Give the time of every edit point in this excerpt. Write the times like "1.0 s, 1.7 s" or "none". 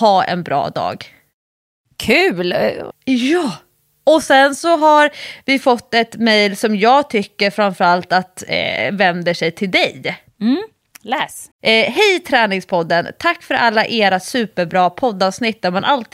2.9 s, 11.5 s